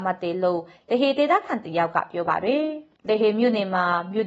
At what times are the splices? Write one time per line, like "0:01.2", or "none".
0:03.0